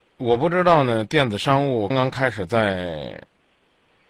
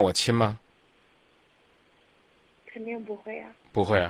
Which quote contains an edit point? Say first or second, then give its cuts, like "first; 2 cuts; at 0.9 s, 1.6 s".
first; 1 cut; at 1.9 s